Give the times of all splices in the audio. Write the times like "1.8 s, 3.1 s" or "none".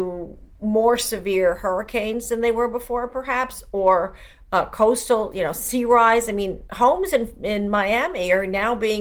none